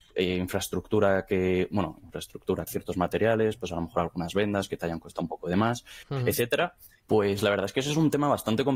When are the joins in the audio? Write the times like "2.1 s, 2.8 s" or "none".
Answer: 2.7 s, 7.0 s